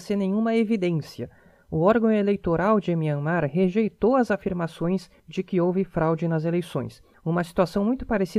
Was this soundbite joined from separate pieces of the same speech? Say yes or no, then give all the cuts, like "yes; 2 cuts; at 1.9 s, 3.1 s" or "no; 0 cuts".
no; 0 cuts